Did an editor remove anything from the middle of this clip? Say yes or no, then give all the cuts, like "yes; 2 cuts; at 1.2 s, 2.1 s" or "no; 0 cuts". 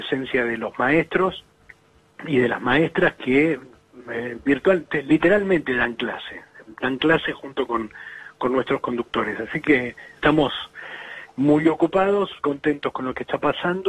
yes; 2 cuts; at 10.2 s, 12.4 s